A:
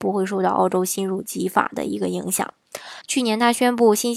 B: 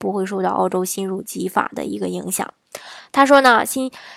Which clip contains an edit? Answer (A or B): A